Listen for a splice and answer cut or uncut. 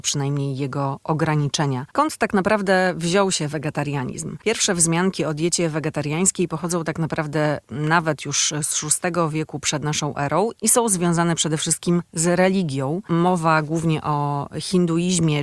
cut